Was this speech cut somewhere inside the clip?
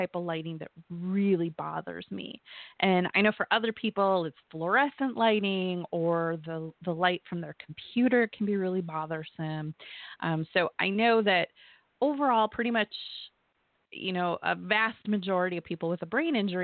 no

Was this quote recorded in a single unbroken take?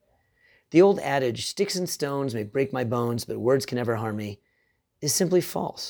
yes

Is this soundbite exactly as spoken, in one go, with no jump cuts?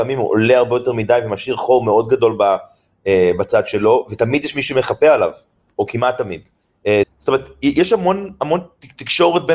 no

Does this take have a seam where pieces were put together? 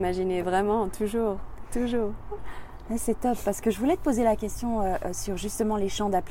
no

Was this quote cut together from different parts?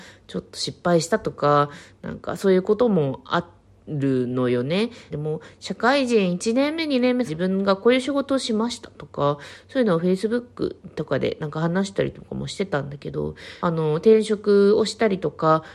yes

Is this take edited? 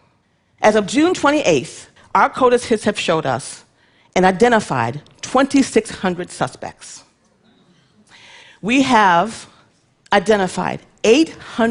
yes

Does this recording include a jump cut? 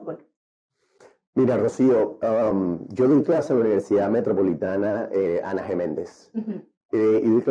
no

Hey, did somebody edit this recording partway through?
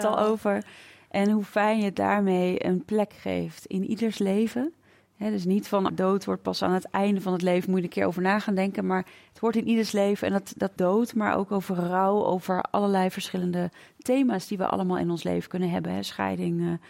yes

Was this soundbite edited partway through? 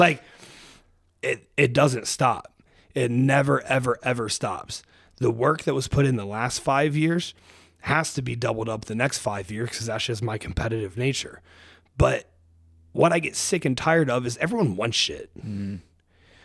no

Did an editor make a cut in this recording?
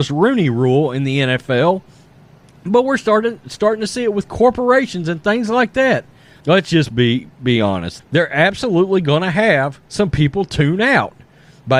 yes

